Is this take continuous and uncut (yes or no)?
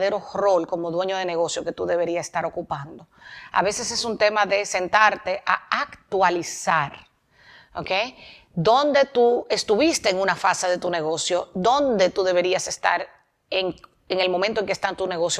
yes